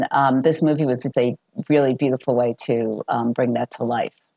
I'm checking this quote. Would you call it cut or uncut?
cut